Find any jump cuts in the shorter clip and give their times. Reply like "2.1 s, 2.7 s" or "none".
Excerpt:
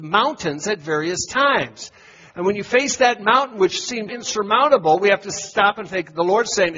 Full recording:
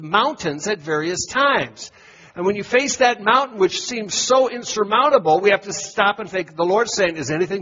4.1 s